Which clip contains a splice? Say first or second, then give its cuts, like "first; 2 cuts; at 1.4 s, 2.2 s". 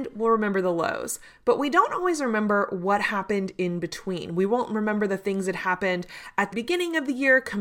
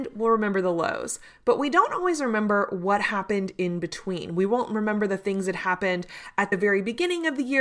first; 1 cut; at 6.5 s